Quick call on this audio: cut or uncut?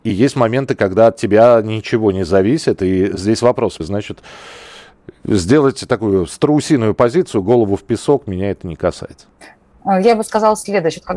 cut